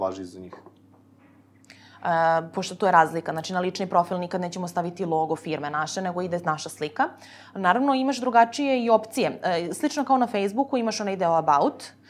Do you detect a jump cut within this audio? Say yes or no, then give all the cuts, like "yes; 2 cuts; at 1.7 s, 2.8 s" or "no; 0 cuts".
yes; 1 cut; at 0.9 s